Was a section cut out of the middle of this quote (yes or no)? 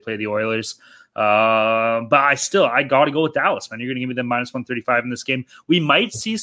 no